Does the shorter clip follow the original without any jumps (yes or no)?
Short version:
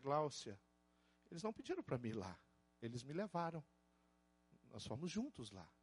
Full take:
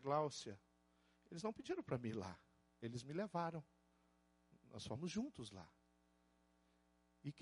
yes